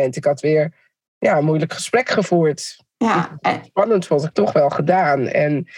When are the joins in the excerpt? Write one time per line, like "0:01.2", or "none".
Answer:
0:04.3